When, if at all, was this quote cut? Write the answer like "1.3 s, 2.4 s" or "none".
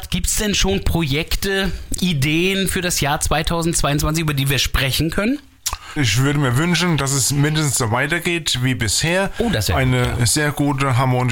6.0 s